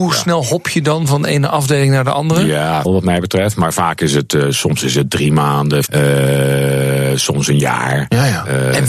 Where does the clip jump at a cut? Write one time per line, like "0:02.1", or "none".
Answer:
0:02.8
0:05.9

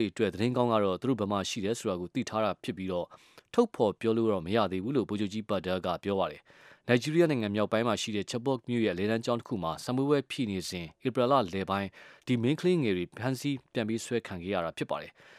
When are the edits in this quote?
none

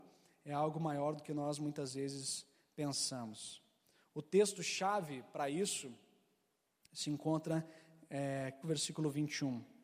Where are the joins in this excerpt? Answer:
0:08.6

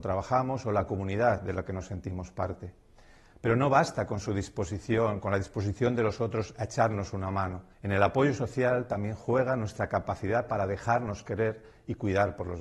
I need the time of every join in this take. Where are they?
0:07.7

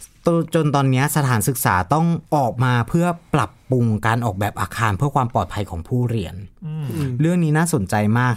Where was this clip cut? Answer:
0:02.3

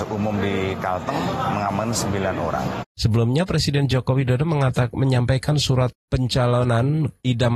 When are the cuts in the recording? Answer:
0:02.8

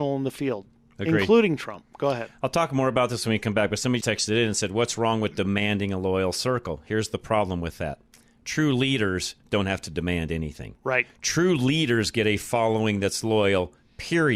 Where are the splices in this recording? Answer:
0:04.0

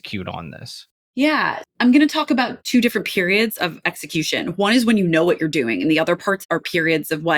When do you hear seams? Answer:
0:01.6

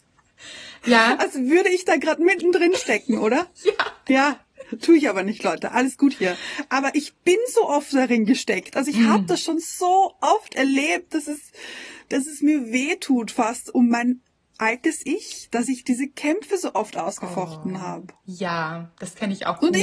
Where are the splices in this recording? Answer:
none

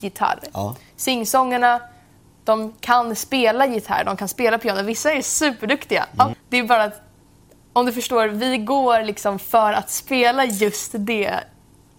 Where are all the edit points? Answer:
0:02.8
0:06.3

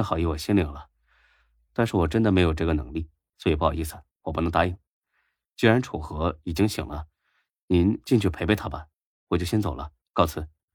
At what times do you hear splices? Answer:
none

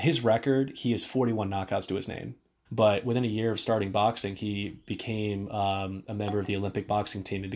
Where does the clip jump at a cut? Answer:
0:02.7

